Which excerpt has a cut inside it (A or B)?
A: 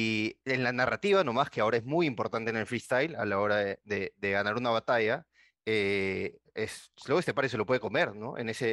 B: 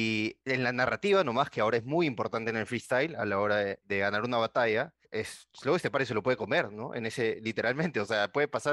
B